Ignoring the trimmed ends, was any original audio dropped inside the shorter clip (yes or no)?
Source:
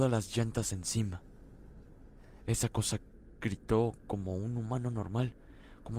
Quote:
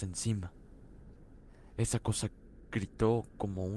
no